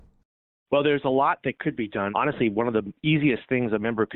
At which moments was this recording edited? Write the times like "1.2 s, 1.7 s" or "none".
2.1 s